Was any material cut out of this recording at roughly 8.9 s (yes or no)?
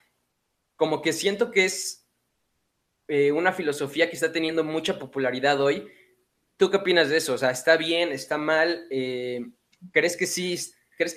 no